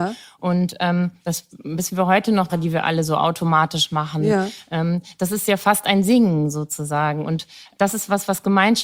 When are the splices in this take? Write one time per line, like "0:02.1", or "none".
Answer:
0:02.5